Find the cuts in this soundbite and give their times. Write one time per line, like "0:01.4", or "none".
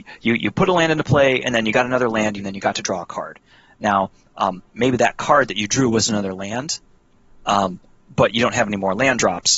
0:02.4